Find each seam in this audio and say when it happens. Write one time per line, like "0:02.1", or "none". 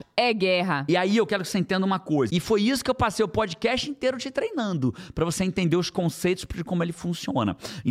0:02.3